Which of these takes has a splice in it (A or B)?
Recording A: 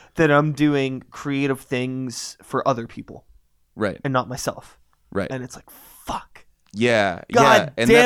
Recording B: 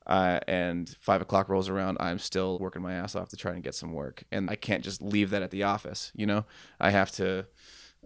B